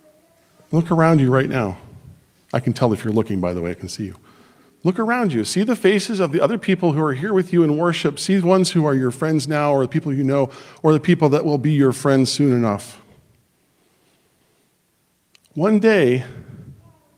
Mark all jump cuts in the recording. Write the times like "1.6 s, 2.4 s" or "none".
none